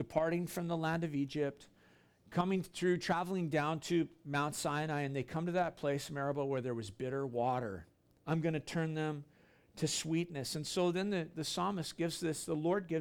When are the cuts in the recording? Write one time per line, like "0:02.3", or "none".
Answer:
0:08.2